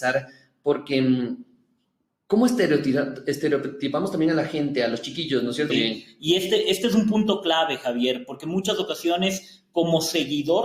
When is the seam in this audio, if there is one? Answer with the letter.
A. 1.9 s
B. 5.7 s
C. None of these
B